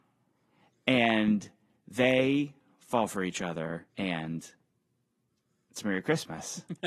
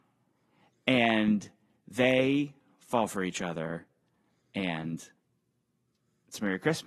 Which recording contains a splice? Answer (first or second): first